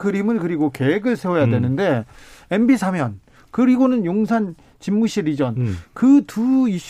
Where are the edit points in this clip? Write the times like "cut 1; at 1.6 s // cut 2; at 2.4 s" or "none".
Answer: none